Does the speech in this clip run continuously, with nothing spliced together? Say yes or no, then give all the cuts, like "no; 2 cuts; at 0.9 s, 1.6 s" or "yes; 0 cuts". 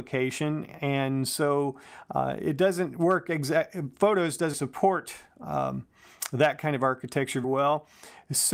no; 2 cuts; at 4.5 s, 7.4 s